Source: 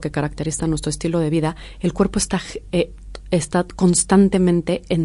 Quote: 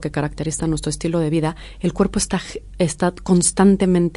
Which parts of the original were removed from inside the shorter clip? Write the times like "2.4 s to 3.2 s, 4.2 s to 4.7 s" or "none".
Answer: 2.7 s to 3.2 s